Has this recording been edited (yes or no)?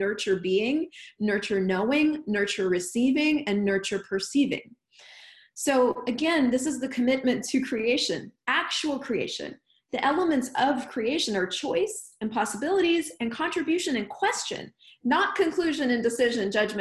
no